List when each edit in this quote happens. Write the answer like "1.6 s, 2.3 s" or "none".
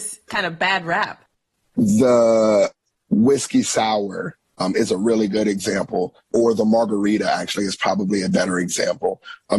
none